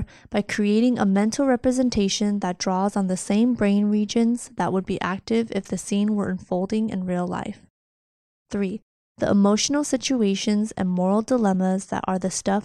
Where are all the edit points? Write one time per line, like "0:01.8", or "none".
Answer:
none